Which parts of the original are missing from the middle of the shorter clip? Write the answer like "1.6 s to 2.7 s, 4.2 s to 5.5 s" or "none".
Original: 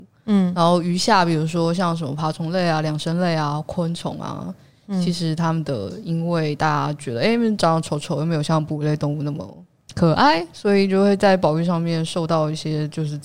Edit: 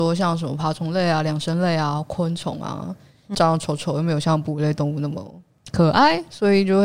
4.9 s to 7.6 s